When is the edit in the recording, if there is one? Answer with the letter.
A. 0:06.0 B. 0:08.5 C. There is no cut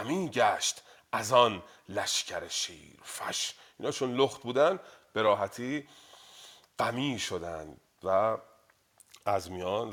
C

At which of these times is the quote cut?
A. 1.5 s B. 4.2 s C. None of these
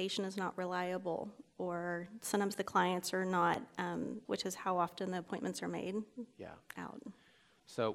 B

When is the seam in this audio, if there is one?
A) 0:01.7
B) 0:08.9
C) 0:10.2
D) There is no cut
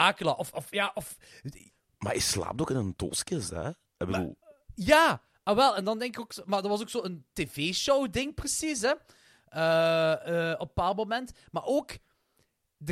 A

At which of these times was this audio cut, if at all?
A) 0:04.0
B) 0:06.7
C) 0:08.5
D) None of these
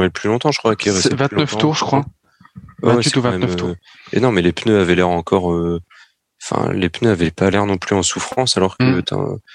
D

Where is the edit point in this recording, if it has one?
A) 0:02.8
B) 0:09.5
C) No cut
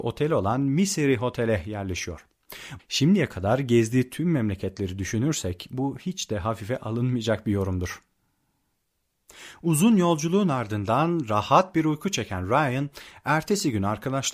A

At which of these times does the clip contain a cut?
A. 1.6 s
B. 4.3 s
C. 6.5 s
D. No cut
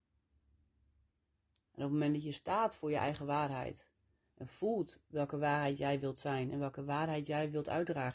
D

